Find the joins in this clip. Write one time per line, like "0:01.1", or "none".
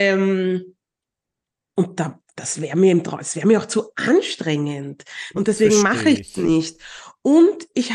0:05.3

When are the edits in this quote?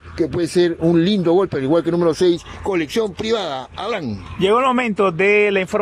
none

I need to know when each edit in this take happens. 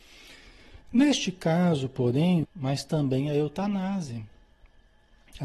0:02.4

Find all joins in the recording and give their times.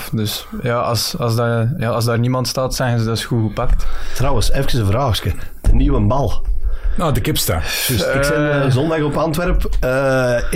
none

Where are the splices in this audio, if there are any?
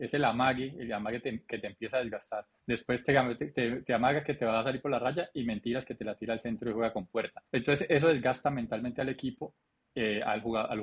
0:02.6
0:07.5

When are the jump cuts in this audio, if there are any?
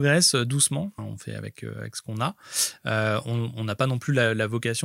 0:01.0

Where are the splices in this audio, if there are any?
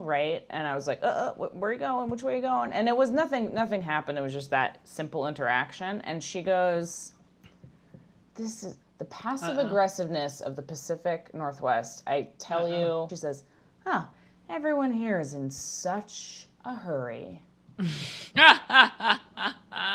0:08.8
0:13.1

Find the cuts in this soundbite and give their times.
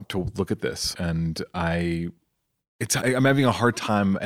0:00.9
0:03.0

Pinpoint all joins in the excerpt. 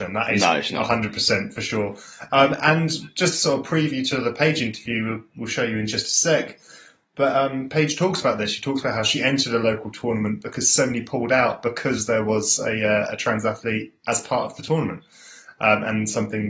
none

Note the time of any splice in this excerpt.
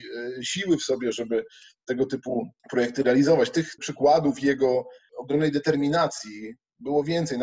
none

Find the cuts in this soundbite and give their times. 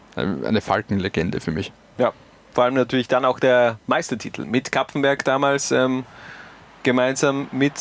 none

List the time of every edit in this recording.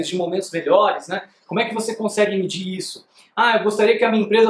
none

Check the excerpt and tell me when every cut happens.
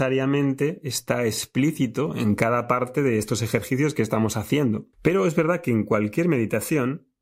0:04.9

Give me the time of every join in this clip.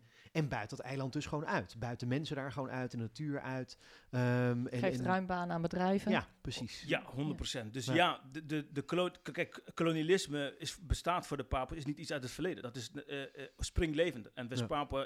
none

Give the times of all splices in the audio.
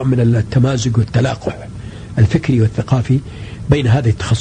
none

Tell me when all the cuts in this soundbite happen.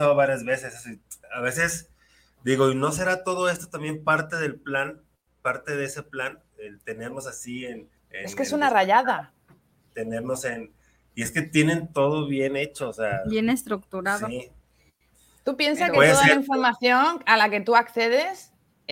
0:01.2
0:08.0

